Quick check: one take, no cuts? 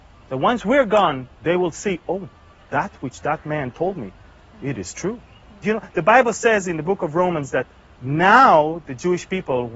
no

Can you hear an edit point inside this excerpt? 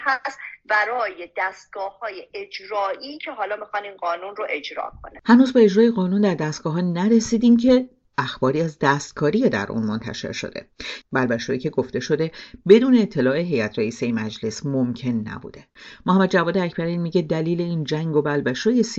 yes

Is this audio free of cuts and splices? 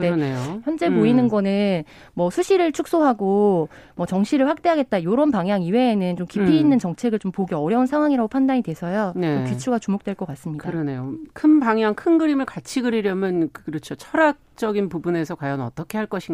yes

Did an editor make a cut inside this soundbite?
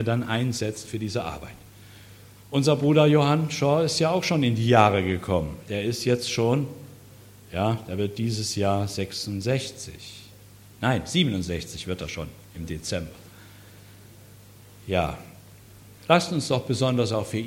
no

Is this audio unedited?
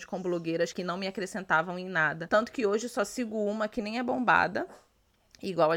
yes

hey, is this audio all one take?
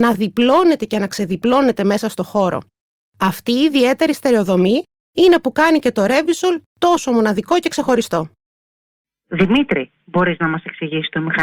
yes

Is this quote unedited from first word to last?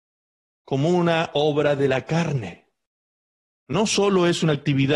yes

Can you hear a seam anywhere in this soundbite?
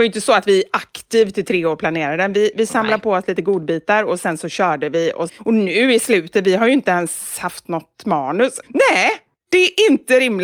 yes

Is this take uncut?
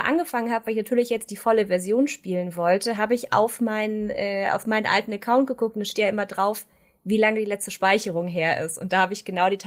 yes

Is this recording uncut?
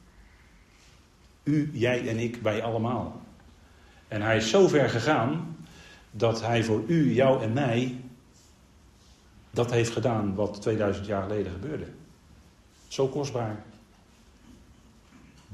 yes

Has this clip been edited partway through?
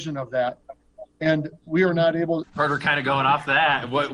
yes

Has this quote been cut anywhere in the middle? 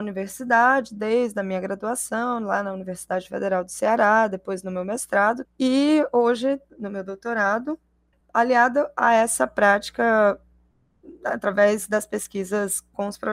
yes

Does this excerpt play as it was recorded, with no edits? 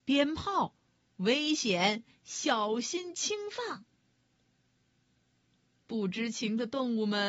yes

